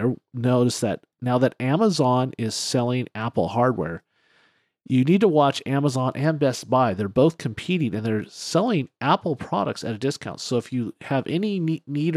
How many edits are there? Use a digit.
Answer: 1